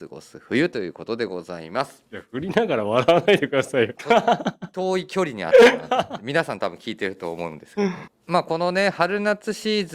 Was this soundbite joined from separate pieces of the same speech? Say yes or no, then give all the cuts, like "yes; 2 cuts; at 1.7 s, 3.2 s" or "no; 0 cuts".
yes; 2 cuts; at 4.0 s, 8.1 s